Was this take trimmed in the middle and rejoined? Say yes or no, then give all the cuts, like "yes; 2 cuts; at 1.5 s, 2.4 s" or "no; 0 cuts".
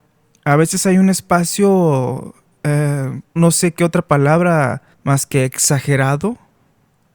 yes; 2 cuts; at 3.4 s, 4.9 s